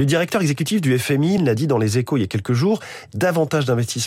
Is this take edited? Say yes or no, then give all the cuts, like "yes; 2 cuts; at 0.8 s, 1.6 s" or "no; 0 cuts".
yes; 1 cut; at 1.4 s